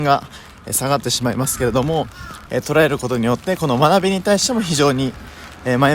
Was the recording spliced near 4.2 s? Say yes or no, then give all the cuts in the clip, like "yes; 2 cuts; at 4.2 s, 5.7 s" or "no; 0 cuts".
no; 1 cut; at 2.5 s